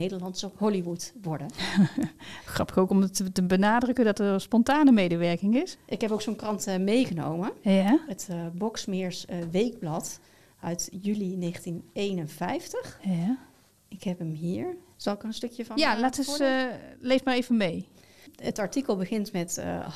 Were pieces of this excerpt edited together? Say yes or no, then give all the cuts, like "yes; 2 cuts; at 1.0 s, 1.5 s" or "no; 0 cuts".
yes; 1 cut; at 5.8 s